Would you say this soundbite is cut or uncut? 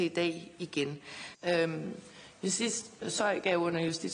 cut